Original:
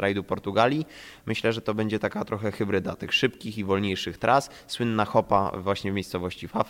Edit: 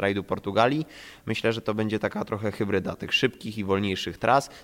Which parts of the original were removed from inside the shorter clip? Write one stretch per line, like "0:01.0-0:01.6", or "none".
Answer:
none